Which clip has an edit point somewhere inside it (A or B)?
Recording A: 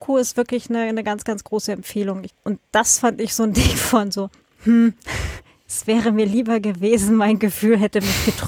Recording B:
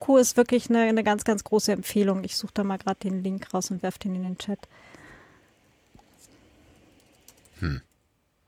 A